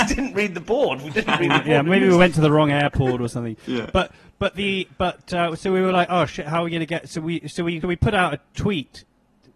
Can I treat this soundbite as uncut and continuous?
no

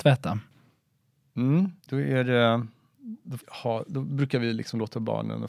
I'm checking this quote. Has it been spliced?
yes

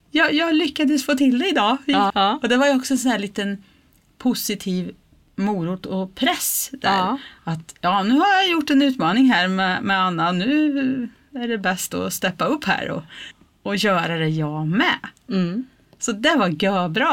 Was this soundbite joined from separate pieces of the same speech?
yes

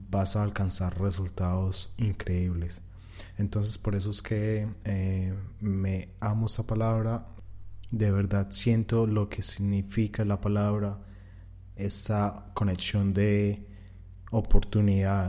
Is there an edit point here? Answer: no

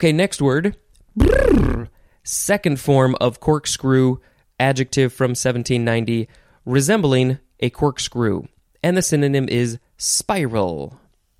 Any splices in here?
no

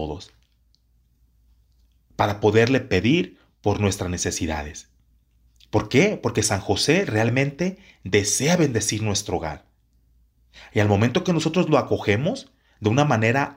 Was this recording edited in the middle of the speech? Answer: no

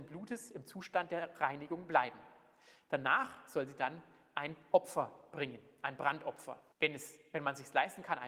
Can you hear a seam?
yes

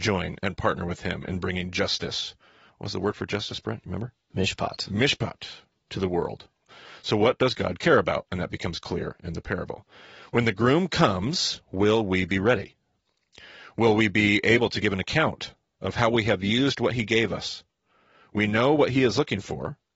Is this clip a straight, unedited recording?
yes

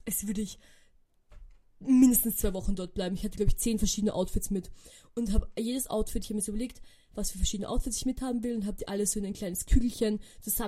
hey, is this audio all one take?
yes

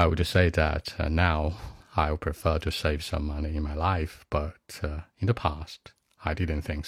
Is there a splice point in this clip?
yes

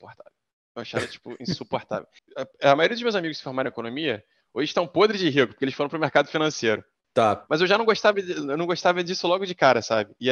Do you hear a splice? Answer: yes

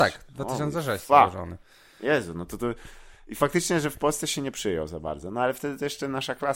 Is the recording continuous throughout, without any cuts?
yes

